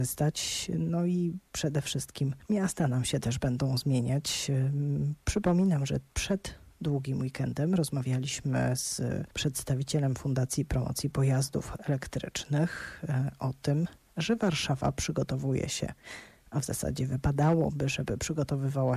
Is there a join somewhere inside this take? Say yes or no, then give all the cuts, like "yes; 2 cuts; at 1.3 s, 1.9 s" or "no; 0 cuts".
no; 0 cuts